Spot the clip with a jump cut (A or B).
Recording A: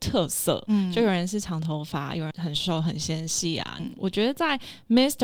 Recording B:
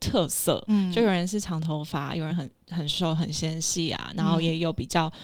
A